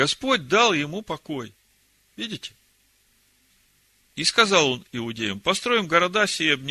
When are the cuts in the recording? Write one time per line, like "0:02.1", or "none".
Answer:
none